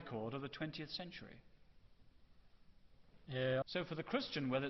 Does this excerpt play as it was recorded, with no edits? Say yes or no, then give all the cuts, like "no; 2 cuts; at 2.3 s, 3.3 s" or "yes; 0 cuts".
no; 1 cut; at 3.6 s